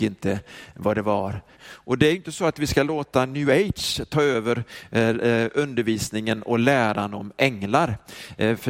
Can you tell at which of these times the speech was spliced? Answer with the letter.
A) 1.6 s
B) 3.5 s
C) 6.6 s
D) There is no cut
A